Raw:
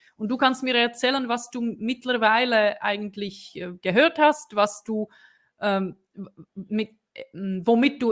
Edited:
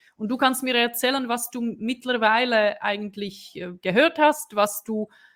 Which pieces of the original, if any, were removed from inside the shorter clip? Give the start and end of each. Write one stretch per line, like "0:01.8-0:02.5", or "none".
none